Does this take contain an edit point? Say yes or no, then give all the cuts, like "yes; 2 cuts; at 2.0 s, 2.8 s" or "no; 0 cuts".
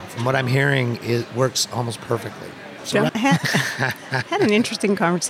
yes; 1 cut; at 3.1 s